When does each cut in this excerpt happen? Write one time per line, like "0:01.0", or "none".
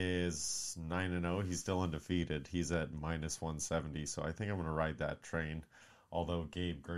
none

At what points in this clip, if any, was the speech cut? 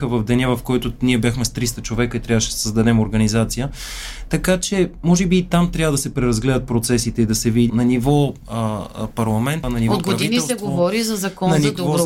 0:07.7
0:09.6

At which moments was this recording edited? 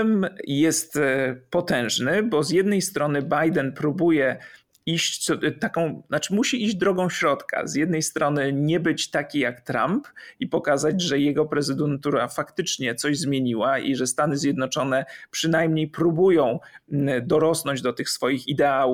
none

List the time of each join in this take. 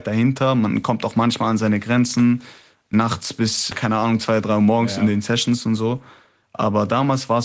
0:03.7

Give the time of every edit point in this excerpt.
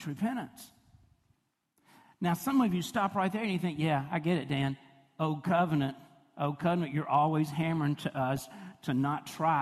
none

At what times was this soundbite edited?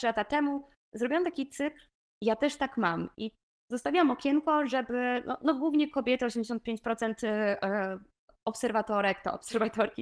none

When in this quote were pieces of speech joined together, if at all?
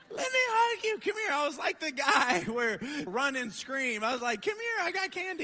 0:03.1

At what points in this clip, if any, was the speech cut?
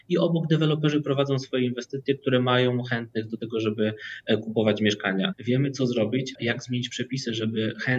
0:05.3
0:06.4

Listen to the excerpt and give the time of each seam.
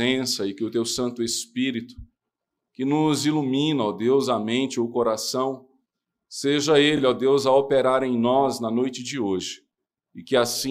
none

